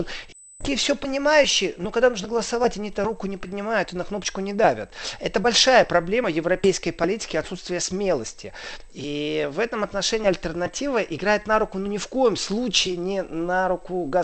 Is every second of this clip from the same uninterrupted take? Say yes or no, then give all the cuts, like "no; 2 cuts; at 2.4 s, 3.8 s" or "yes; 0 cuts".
yes; 0 cuts